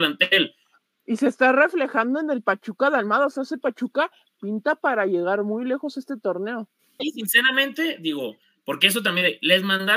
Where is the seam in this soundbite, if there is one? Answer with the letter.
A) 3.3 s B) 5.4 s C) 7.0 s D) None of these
C